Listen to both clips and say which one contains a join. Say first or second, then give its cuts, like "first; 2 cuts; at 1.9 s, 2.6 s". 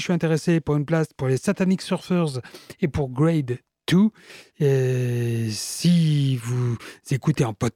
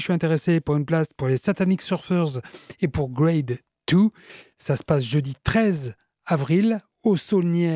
first; 1 cut; at 4.5 s